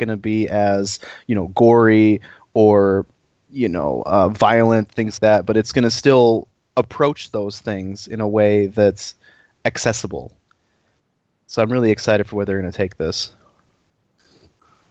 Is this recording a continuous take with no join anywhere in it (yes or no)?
no